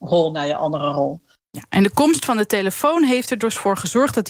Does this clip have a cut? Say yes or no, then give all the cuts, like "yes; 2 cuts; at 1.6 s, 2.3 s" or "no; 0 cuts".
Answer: no; 0 cuts